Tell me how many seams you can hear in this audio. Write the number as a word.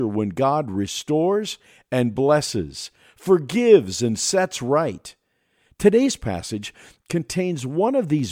zero